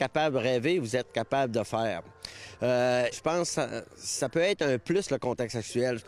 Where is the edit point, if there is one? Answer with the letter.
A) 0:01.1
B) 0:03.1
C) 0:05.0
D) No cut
B